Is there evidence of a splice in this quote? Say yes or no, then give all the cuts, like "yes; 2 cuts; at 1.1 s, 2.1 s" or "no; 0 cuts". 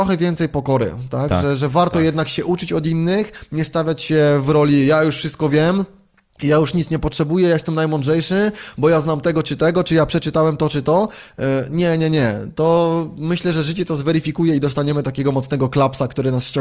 no; 0 cuts